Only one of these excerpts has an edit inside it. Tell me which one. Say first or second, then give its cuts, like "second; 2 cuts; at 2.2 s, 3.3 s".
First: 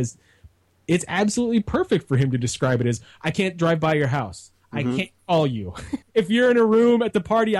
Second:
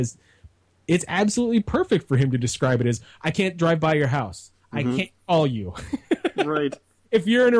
first; 1 cut; at 6.0 s